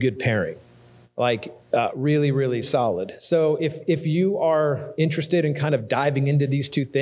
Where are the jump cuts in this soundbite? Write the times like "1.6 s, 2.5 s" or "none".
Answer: none